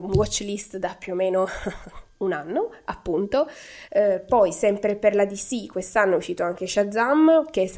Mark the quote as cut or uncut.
cut